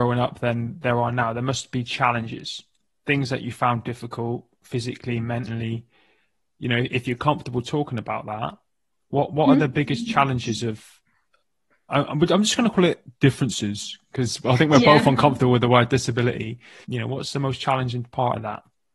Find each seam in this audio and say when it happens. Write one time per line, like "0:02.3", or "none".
0:16.8

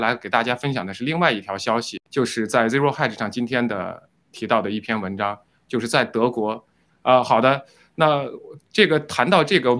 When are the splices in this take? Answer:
0:02.1
0:06.9

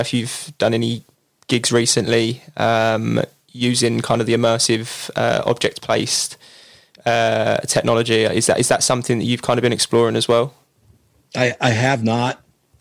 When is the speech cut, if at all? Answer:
none

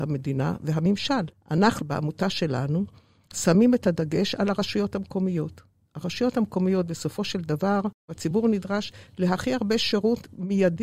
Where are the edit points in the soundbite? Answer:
0:01.8

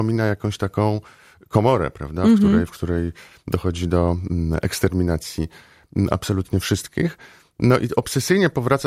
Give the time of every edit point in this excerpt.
none

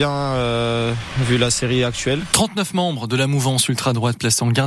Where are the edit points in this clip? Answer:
0:02.3

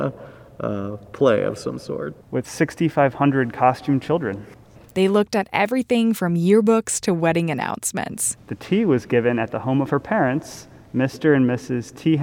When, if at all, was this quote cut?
0:02.2
0:08.4

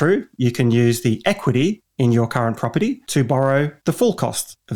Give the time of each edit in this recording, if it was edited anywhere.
none

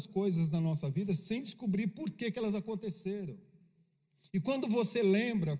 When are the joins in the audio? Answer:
none

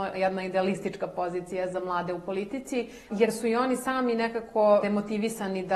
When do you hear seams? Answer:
0:03.1
0:04.8

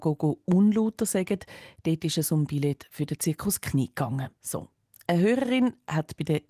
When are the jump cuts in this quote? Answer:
0:04.4

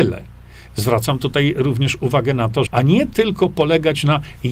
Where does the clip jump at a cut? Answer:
0:02.7

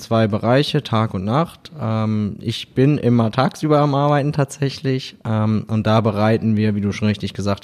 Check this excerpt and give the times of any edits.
none

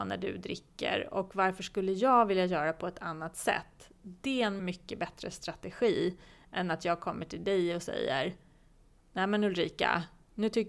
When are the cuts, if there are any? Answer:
0:04.6

